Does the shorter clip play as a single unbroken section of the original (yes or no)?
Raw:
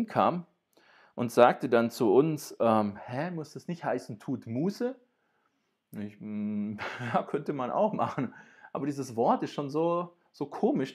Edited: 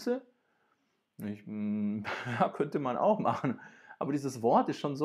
yes